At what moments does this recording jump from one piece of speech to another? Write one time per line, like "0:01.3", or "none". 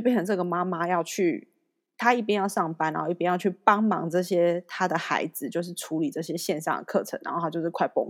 none